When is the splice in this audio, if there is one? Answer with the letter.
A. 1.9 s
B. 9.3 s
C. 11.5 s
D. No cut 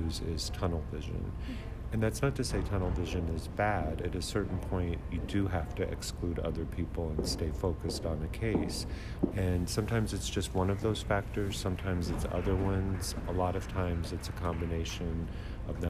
B